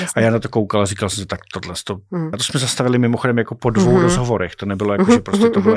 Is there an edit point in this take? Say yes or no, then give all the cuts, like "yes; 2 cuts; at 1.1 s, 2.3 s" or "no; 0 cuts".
yes; 1 cut; at 2.3 s